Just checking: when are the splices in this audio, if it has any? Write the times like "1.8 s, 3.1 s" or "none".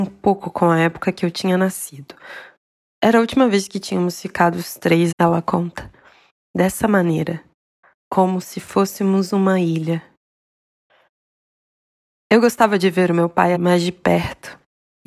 5.1 s, 13.6 s